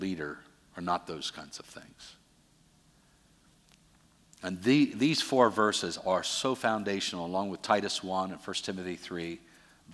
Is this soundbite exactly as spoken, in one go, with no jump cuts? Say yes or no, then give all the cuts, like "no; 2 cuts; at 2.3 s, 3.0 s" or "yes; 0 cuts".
yes; 0 cuts